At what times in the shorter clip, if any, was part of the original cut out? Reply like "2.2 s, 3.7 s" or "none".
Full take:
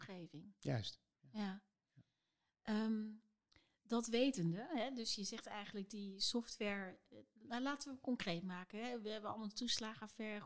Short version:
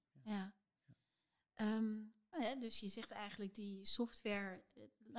2.3 s